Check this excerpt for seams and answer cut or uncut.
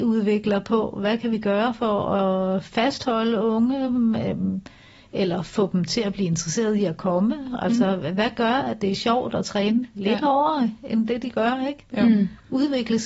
uncut